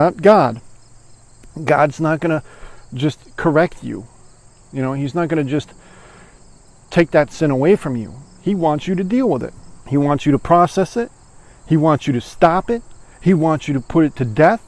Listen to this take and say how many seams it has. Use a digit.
2